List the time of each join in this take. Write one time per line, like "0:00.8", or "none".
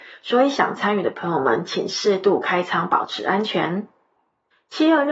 none